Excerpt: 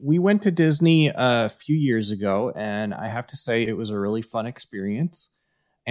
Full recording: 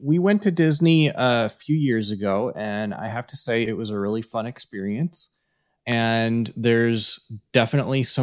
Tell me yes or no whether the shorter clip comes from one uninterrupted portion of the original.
yes